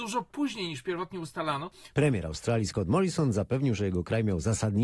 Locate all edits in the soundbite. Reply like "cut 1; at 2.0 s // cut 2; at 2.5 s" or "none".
cut 1; at 1.9 s